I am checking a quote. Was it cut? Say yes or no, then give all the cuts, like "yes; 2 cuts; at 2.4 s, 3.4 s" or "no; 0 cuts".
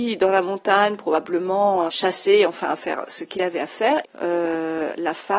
yes; 2 cuts; at 1.9 s, 4.0 s